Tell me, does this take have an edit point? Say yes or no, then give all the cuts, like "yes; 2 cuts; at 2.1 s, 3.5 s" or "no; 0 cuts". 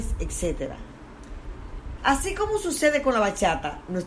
yes; 1 cut; at 2.0 s